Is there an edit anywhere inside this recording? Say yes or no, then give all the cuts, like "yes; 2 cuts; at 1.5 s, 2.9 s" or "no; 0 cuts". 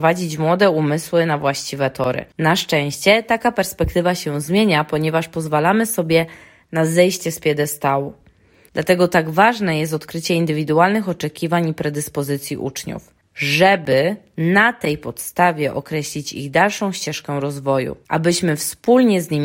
yes; 1 cut; at 8.7 s